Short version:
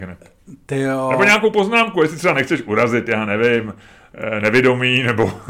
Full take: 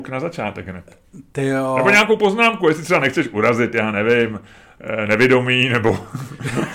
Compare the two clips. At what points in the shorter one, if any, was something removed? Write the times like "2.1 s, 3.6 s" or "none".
none